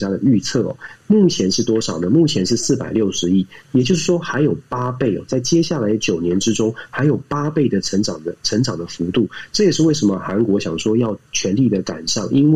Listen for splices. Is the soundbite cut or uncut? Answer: uncut